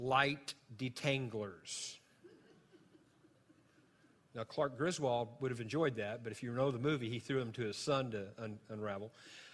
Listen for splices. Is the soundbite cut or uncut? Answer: uncut